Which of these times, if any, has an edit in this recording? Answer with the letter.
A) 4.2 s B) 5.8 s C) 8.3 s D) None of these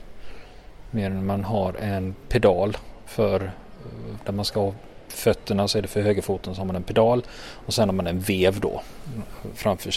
A